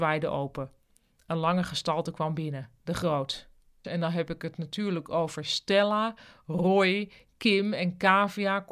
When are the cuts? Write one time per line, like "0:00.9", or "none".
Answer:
0:03.8